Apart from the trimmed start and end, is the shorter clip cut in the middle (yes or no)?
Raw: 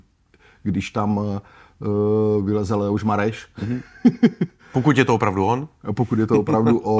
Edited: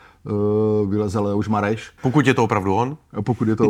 yes